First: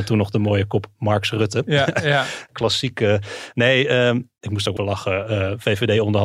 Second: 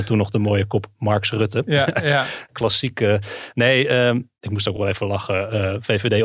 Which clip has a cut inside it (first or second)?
first